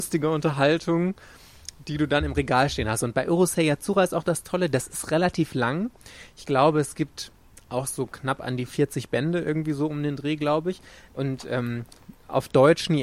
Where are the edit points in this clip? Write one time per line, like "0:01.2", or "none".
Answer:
none